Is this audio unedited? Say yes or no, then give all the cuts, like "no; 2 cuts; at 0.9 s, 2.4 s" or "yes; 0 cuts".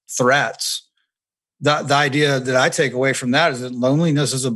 yes; 0 cuts